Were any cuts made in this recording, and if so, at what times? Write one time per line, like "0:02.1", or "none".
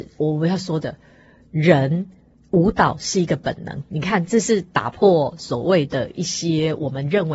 none